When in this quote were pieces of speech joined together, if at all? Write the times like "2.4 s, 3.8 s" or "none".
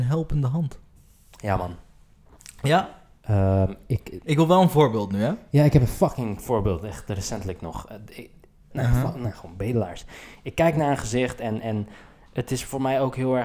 4.2 s, 8.7 s